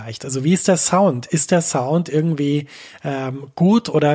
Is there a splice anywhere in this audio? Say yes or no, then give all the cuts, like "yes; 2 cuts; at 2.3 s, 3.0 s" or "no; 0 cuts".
no; 0 cuts